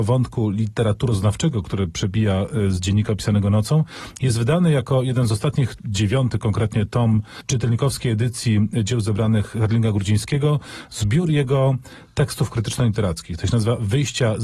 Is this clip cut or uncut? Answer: uncut